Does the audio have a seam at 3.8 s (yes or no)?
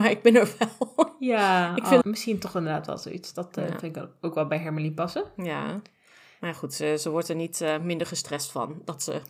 no